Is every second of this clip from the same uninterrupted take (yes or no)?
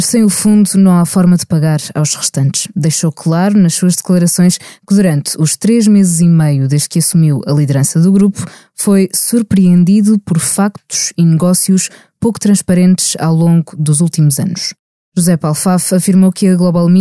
yes